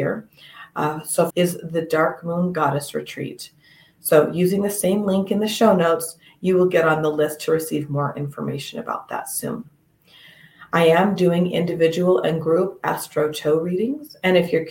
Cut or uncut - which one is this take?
cut